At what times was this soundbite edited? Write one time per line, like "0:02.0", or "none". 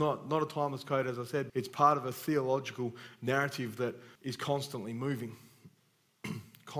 0:01.5
0:04.2